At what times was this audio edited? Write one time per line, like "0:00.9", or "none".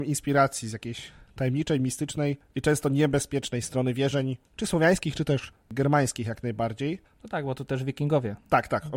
none